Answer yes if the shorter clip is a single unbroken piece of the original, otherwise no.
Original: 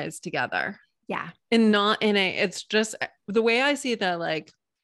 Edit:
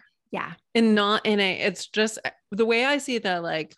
yes